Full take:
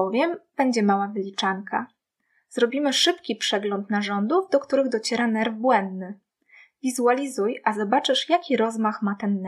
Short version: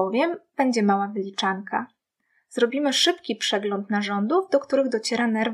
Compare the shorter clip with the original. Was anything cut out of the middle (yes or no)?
no